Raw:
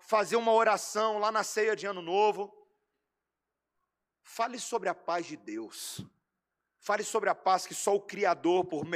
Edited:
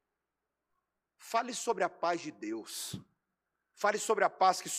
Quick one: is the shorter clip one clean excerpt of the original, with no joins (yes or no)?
yes